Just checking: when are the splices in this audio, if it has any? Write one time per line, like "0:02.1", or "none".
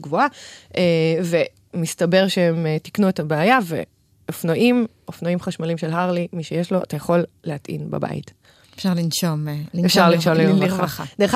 none